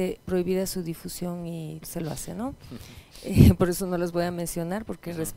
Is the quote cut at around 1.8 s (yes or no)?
yes